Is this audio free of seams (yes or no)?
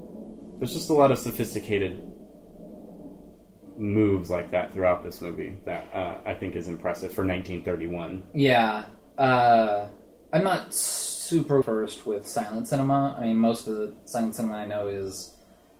no